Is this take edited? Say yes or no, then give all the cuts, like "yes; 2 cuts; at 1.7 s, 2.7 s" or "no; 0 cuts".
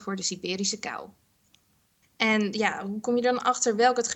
yes; 1 cut; at 2.0 s